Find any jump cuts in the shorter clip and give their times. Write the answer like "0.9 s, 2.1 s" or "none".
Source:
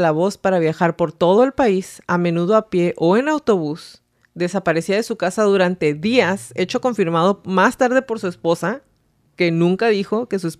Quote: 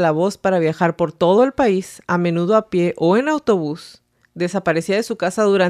none